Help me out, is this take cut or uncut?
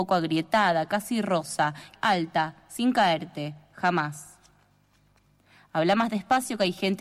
cut